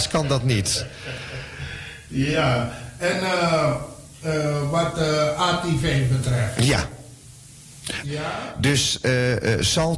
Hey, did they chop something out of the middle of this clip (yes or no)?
yes